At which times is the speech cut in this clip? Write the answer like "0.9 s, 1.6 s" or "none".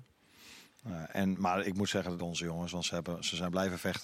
2.2 s